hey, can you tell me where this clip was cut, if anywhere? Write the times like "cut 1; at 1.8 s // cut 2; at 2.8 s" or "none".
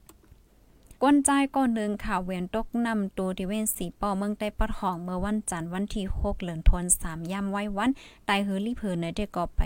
cut 1; at 1.0 s